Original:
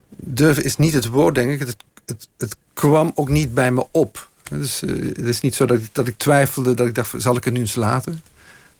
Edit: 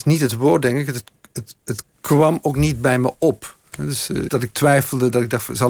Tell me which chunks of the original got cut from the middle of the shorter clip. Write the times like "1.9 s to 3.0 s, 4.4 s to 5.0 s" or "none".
5.0 s to 5.9 s